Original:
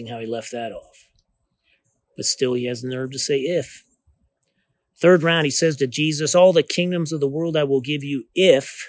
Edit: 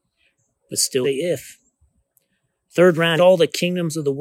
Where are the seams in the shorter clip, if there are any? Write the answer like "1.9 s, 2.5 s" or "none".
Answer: 1.0 s, 3.2 s